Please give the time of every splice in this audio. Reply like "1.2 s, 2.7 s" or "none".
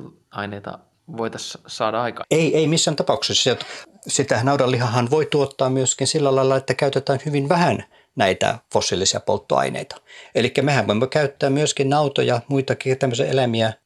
10.3 s